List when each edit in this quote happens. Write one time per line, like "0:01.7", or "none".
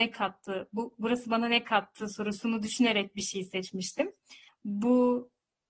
0:04.5